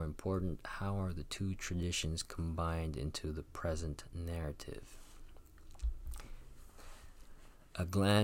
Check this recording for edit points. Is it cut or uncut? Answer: cut